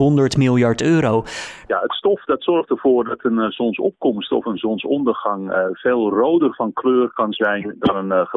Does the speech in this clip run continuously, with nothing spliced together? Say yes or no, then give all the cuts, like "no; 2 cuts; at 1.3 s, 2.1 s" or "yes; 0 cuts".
no; 1 cut; at 1.7 s